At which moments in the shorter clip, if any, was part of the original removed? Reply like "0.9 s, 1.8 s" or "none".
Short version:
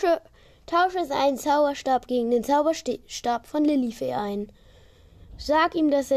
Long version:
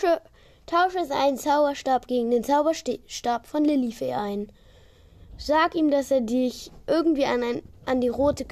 none